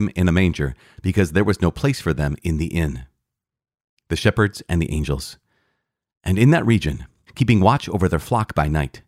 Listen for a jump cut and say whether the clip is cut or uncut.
cut